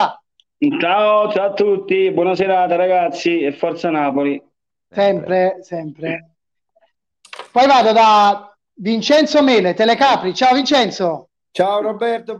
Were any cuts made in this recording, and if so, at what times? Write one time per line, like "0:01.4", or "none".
none